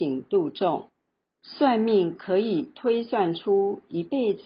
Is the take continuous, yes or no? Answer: no